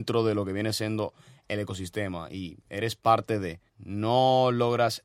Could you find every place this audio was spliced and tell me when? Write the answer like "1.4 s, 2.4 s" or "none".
3.7 s